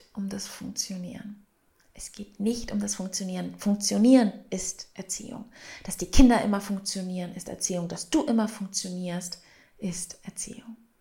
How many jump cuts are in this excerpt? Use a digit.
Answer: 0